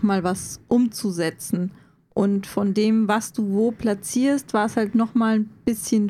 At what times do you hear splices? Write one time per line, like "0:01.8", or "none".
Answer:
none